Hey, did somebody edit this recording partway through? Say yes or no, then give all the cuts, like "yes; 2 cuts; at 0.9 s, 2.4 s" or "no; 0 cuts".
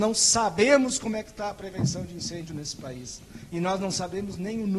no; 0 cuts